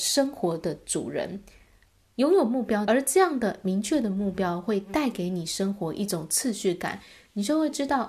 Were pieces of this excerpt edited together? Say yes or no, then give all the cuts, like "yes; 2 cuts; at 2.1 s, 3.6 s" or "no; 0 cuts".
yes; 1 cut; at 2.8 s